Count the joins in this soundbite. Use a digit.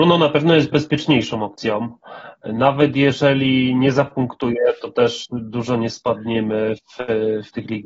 0